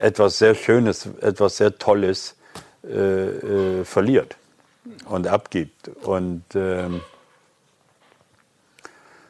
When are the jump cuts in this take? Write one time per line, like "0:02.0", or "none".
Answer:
none